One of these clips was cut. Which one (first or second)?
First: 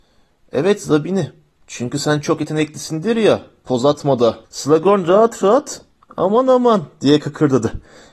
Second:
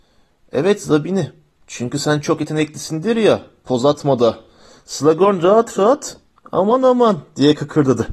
first